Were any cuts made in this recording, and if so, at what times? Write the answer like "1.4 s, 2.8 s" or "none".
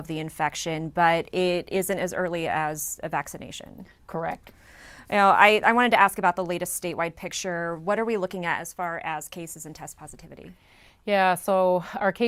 none